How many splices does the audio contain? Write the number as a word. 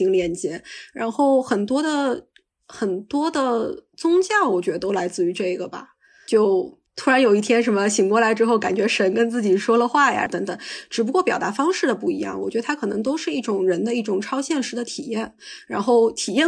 one